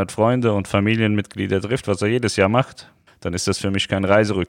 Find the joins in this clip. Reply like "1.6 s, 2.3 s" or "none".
3.1 s